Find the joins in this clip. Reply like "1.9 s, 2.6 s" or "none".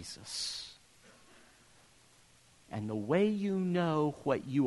2.7 s